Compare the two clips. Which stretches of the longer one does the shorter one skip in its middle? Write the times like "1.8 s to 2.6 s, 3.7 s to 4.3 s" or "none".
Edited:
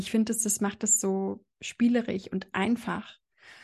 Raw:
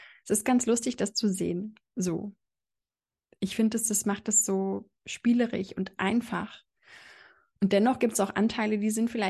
none